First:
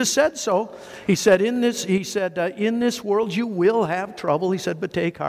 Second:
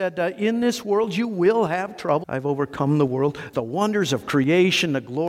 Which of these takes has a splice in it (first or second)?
second